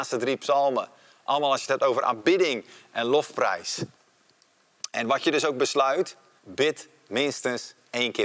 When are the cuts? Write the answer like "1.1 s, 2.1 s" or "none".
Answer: 6.4 s